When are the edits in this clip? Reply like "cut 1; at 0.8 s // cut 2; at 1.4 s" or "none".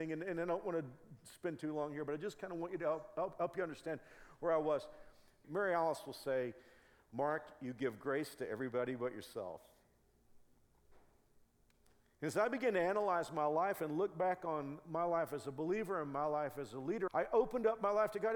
cut 1; at 5.4 s // cut 2; at 17.1 s